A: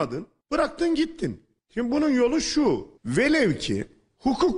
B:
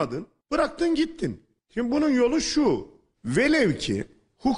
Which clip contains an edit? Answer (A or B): A